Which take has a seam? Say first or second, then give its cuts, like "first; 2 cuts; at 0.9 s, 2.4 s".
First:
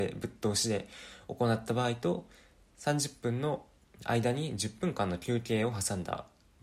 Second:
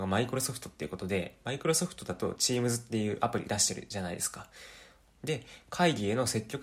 second; 1 cut; at 5.1 s